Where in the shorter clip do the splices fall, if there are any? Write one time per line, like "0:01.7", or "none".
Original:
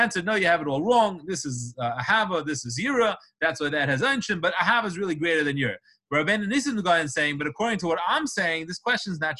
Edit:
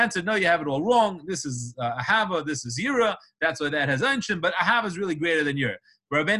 none